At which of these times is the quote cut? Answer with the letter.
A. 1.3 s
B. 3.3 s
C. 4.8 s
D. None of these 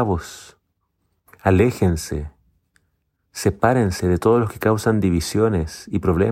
A